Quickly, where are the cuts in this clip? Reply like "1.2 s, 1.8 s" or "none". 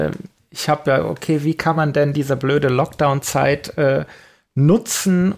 none